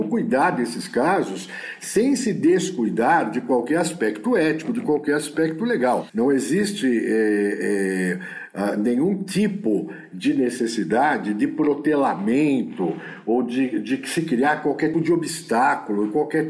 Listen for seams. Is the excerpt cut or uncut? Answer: cut